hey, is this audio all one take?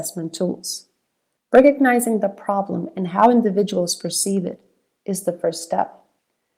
no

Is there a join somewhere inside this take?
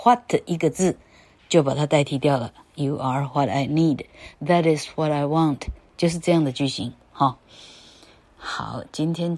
no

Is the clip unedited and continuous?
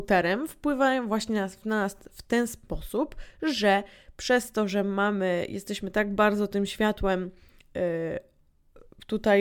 yes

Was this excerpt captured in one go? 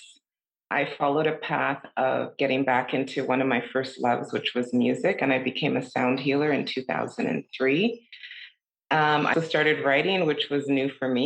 no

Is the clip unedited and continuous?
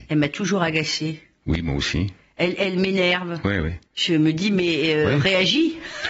no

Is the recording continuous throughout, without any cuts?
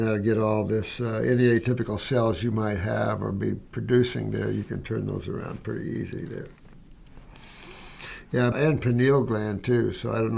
no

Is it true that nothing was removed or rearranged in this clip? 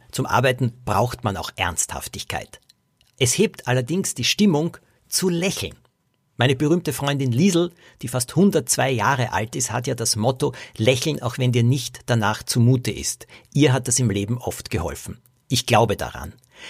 yes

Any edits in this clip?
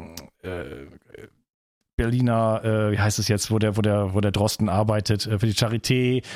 no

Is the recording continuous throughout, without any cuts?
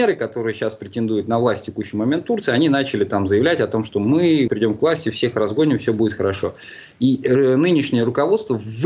no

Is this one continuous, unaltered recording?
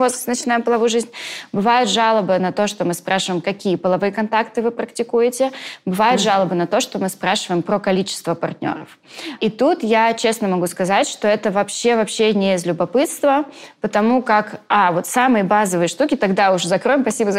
yes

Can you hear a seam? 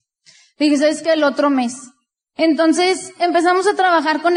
yes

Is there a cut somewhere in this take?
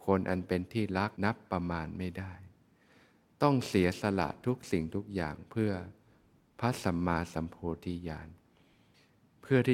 yes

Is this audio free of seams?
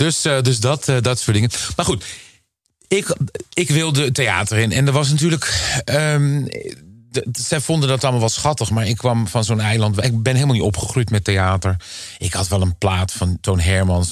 yes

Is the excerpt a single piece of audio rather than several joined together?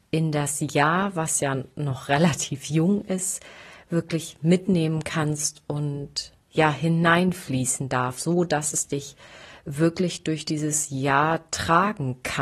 no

